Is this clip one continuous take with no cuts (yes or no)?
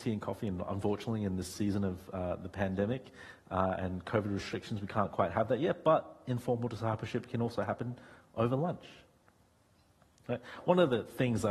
yes